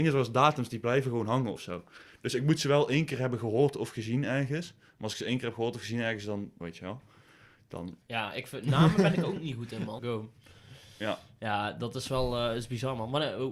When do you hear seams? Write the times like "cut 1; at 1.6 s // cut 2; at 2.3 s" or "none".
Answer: cut 1; at 6.6 s // cut 2; at 8.0 s // cut 3; at 10.0 s